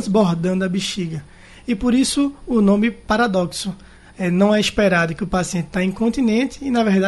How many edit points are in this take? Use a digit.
0